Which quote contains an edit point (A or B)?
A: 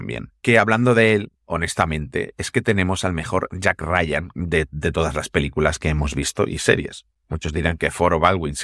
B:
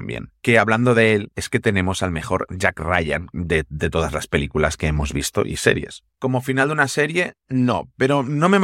B